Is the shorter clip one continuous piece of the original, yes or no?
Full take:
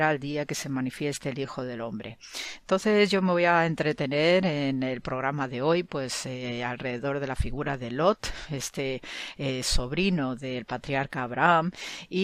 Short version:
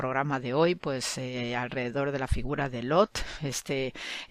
yes